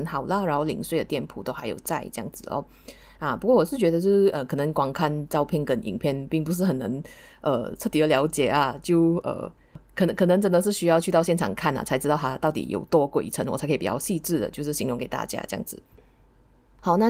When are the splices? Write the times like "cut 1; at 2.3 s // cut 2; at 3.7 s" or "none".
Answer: none